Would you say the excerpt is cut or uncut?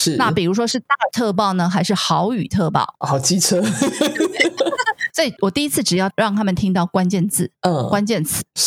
uncut